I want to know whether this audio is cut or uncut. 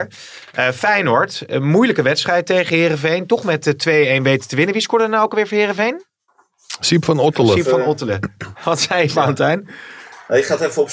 uncut